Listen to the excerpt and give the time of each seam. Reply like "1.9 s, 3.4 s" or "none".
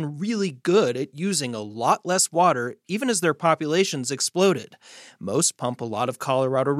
none